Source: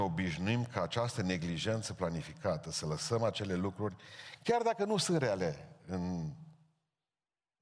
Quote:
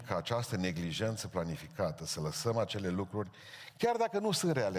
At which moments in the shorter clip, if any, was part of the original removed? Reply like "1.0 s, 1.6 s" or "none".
none